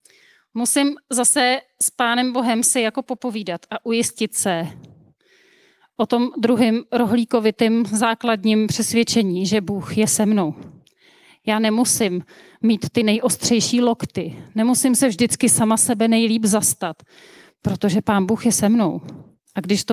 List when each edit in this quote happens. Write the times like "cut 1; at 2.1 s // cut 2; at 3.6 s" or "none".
none